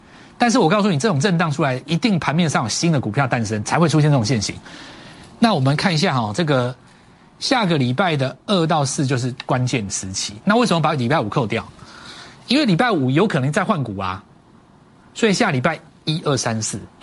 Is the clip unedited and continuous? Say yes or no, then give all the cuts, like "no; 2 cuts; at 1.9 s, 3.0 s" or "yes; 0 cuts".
yes; 0 cuts